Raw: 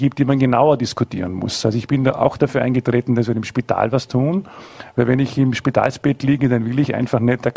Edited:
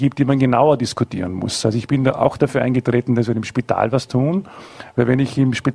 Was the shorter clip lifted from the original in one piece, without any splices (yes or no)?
yes